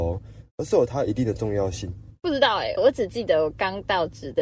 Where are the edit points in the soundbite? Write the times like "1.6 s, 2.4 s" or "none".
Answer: 2.8 s